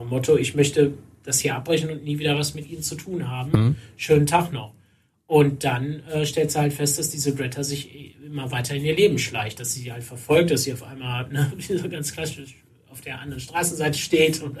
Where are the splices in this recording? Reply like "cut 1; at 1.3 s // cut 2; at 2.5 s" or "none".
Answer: none

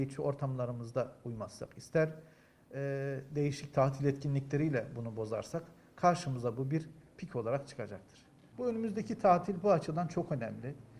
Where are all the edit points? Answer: none

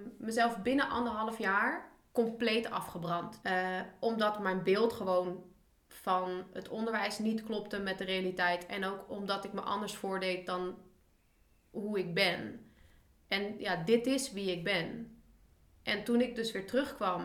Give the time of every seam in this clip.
cut 1; at 3.4 s

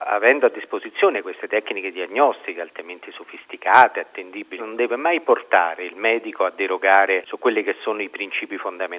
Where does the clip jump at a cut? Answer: cut 1; at 4.6 s

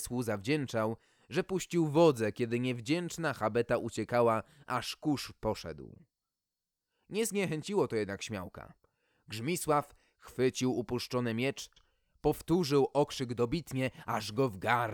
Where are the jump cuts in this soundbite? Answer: none

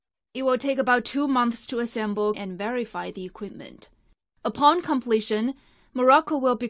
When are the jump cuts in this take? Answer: cut 1; at 2.3 s

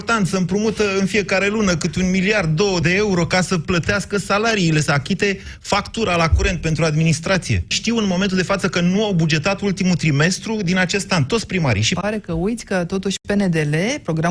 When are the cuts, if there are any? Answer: cut 1; at 2.8 s // cut 2; at 7.7 s // cut 3; at 12.0 s

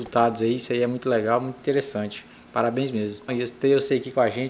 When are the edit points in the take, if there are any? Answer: cut 1; at 3.3 s

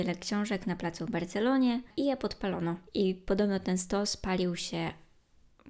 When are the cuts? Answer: cut 1; at 2.9 s

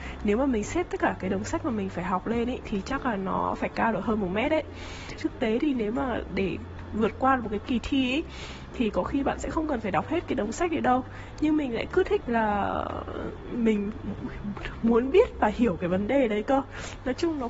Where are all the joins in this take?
cut 1; at 5.2 s // cut 2; at 12.2 s

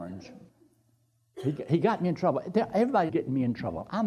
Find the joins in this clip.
cut 1; at 3.1 s

